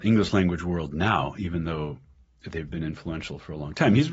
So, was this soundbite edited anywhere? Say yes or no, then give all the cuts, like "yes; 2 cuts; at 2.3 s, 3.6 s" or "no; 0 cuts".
no; 0 cuts